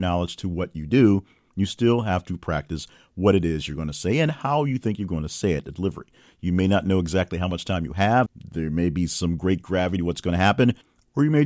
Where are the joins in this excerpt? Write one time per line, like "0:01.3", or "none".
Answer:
0:08.3